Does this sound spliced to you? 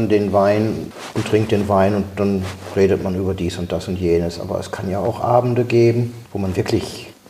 no; 0 cuts

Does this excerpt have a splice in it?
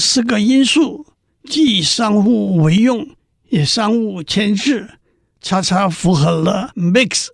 no; 0 cuts

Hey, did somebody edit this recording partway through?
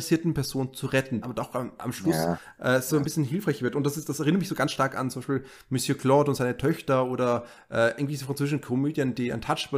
yes; 1 cut; at 1.2 s

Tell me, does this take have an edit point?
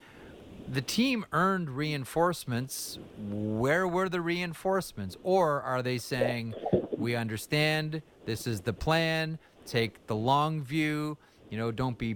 no; 0 cuts

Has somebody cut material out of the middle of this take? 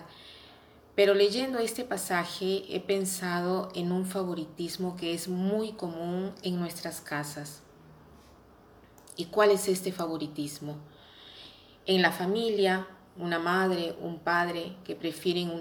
no; 0 cuts

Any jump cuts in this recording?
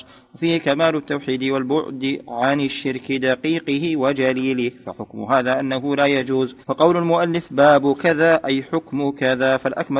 yes; 1 cut; at 6.6 s

